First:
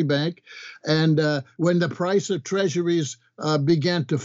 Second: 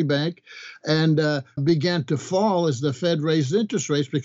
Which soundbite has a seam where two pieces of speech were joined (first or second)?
second